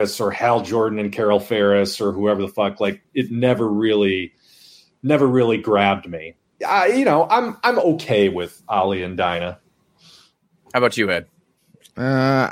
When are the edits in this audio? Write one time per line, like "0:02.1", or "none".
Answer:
0:06.6